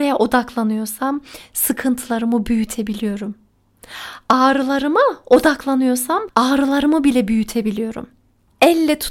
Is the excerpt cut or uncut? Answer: uncut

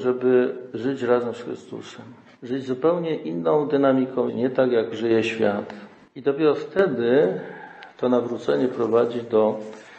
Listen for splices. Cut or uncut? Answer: cut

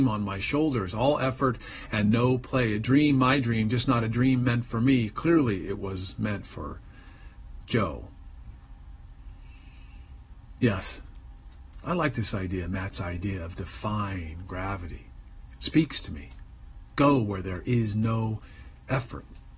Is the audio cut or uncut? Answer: uncut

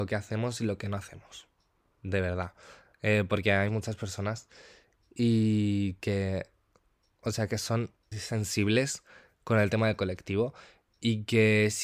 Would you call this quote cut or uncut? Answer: cut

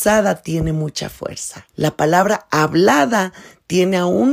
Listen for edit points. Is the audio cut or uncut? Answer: cut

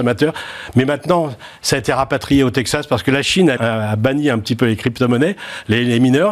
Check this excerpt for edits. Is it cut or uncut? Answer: cut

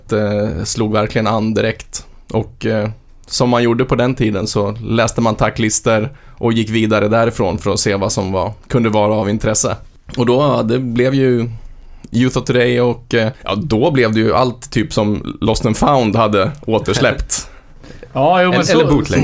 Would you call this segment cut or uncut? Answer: uncut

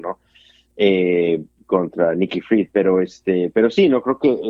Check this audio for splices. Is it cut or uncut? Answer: uncut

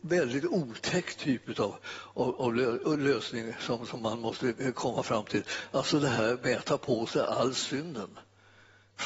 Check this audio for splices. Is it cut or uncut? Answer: uncut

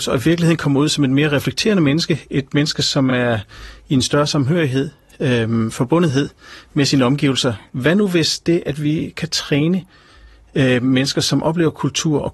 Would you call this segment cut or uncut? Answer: uncut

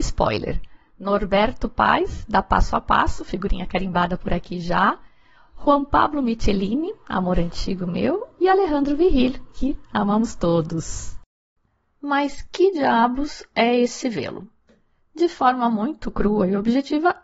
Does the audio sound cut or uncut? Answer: uncut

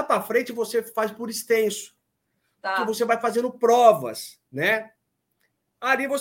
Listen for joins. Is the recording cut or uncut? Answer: uncut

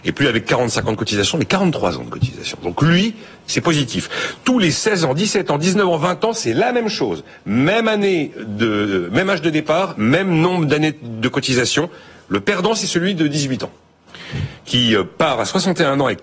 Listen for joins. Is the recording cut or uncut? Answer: uncut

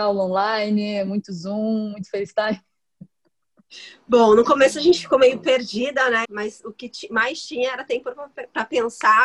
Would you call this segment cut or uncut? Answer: cut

